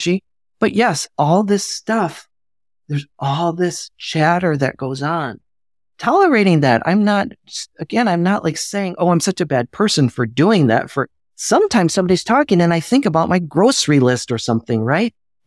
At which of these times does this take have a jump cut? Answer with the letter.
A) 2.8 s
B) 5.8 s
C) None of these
C